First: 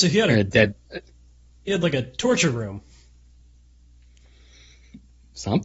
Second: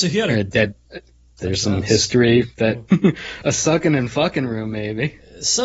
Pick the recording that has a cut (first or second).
second